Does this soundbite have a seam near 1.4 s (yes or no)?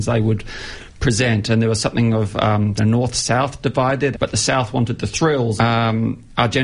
no